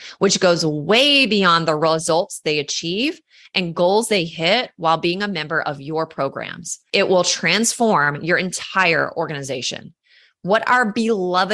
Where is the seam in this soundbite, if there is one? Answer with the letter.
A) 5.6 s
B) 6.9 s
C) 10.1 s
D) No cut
B